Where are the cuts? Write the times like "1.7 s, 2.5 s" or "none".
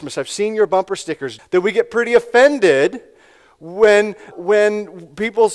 1.4 s, 4.3 s